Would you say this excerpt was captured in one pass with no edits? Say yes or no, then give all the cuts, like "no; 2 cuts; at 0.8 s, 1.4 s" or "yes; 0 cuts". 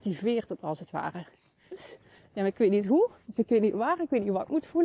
no; 1 cut; at 1.7 s